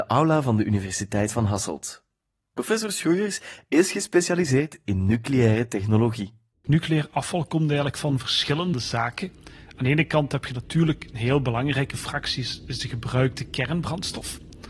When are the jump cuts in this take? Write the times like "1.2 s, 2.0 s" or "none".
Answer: 6.5 s